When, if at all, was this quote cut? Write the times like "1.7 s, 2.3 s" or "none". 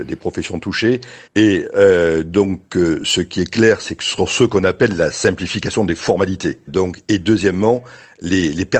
1.3 s, 6.7 s